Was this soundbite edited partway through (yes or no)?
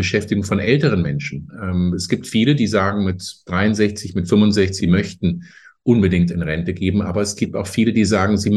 yes